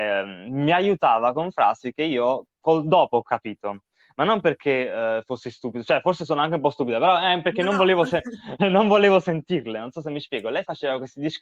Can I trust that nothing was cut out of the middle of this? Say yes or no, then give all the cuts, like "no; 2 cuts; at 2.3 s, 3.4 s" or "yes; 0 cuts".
yes; 0 cuts